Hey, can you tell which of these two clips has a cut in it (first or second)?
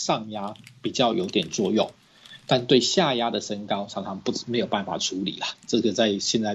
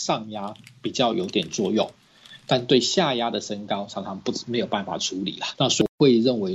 second